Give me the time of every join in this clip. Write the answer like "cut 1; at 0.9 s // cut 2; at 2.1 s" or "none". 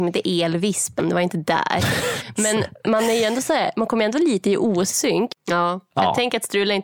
cut 1; at 5.3 s